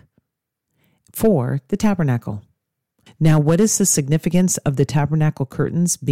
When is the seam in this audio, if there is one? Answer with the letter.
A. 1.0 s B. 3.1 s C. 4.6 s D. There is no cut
B